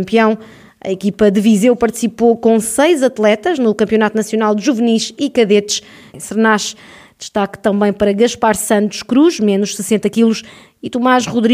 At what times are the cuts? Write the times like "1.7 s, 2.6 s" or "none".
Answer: 6.1 s